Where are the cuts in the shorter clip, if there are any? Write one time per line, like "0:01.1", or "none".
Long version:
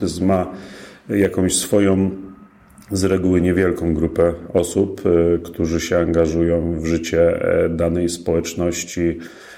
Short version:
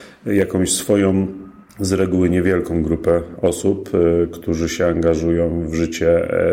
0:01.7